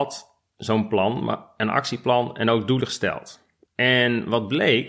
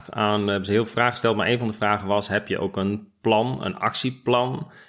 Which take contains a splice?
first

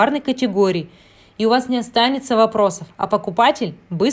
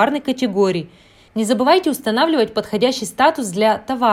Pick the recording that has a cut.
second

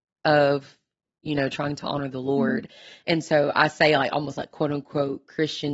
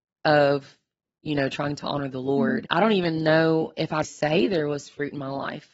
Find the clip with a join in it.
second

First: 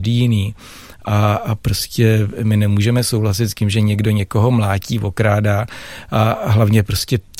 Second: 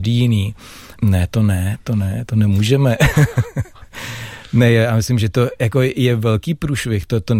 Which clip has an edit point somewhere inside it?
second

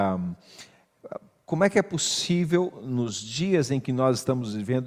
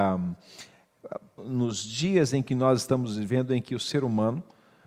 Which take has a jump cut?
second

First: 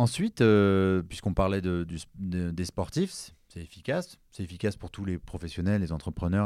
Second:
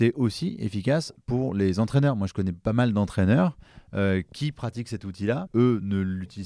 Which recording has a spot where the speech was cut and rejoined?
second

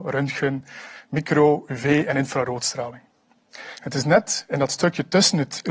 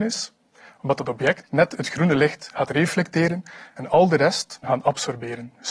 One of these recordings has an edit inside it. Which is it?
second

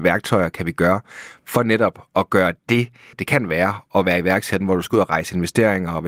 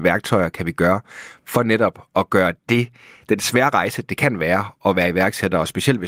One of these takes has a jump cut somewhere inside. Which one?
first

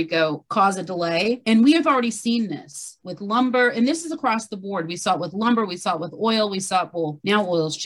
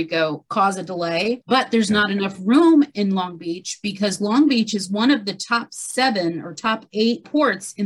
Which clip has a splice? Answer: second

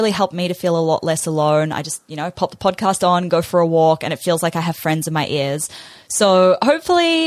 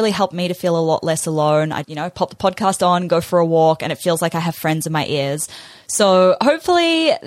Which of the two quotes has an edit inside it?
second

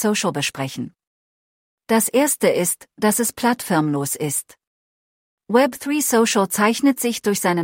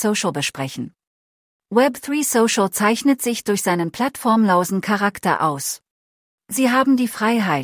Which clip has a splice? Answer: second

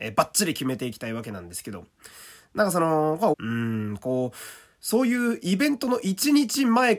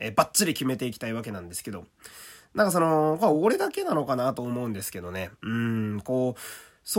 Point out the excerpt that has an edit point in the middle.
first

